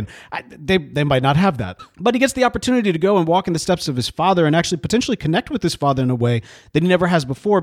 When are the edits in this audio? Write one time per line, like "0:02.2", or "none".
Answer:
0:01.8